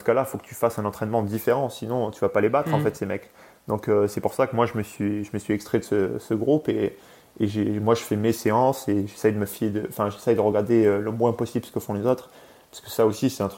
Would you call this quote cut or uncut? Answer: uncut